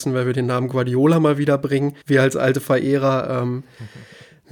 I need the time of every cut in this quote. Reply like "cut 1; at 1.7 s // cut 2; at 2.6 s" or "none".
cut 1; at 2.0 s